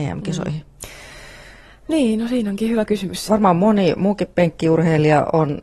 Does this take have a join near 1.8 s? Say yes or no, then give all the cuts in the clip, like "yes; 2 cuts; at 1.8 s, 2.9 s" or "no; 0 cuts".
no; 1 cut; at 3.3 s